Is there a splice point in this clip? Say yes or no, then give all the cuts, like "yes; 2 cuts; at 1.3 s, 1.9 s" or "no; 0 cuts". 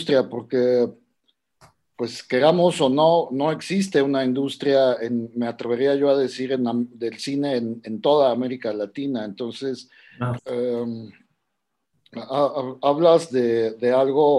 yes; 1 cut; at 10.4 s